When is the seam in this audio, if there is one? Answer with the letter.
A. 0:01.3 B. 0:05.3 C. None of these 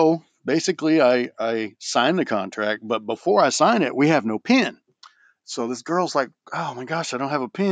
C